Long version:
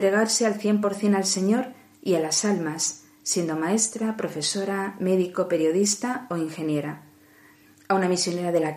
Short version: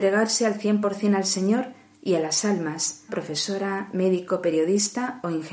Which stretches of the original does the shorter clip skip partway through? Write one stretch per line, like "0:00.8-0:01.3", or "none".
0:03.1-0:04.1